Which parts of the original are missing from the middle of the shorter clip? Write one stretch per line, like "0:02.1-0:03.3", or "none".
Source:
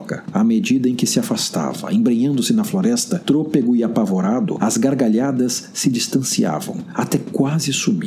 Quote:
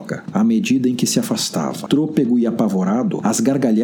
0:01.9-0:03.2